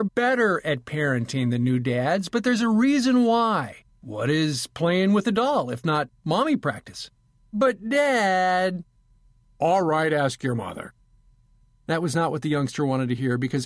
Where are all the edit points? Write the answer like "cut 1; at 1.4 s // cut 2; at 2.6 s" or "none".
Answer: cut 1; at 3.9 s // cut 2; at 7.3 s